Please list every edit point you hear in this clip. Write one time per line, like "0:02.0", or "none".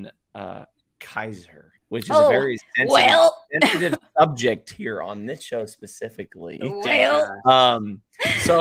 0:01.8